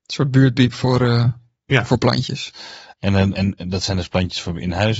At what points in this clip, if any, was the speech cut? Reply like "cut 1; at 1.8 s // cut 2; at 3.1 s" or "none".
cut 1; at 3.3 s